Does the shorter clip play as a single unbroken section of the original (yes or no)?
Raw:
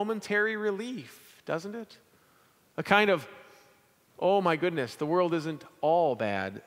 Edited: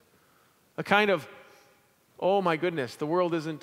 yes